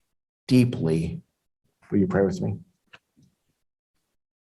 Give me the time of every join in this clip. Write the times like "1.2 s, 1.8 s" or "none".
1.8 s